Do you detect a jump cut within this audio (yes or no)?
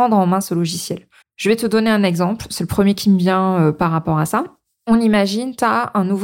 yes